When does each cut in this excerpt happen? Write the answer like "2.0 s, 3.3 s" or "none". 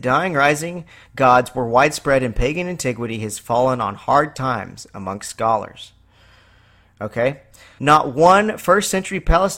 7.8 s